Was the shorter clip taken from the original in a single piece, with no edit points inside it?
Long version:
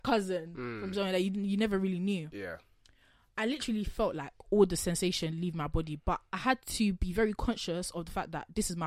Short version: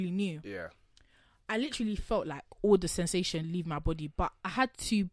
yes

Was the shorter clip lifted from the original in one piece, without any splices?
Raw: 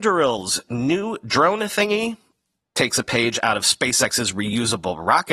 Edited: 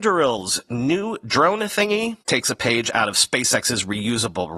no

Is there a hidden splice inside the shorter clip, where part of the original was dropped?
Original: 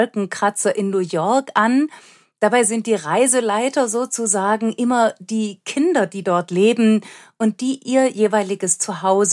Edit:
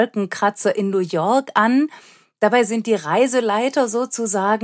no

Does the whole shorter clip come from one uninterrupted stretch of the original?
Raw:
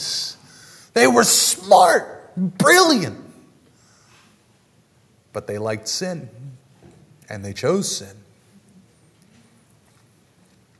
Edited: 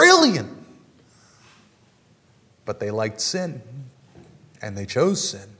yes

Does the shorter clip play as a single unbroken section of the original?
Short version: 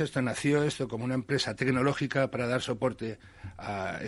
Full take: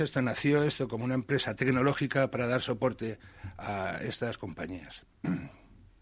yes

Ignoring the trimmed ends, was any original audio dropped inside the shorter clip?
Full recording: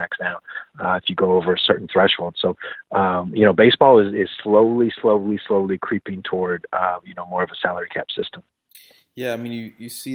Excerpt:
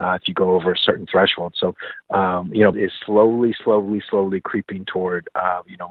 yes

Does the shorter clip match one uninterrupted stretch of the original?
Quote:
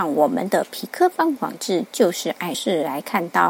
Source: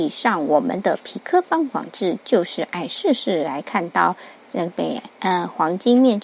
no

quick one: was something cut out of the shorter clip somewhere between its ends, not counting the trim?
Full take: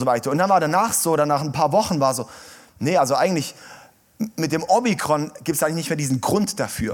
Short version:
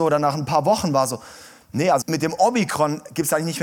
yes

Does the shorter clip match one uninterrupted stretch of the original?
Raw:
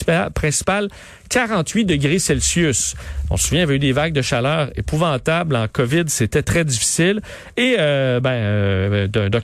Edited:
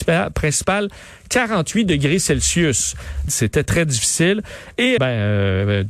no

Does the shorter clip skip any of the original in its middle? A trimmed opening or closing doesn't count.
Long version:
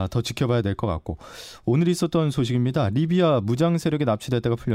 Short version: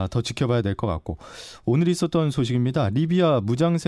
no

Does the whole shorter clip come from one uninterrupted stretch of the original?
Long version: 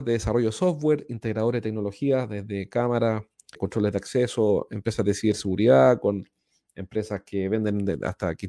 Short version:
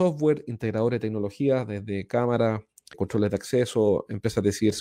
yes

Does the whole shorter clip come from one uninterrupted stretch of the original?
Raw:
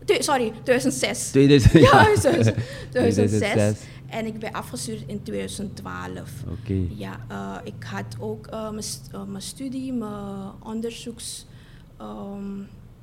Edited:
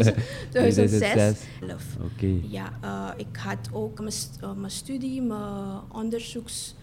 no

